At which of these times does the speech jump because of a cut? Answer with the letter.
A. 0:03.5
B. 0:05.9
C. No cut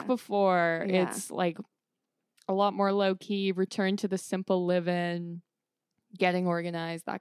C